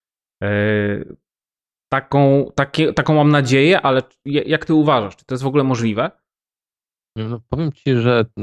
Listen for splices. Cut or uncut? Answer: uncut